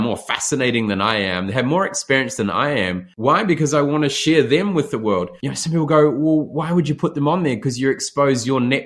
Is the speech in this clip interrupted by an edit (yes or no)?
no